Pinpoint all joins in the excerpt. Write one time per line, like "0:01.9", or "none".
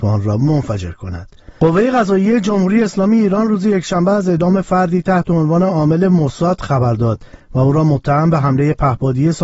0:01.6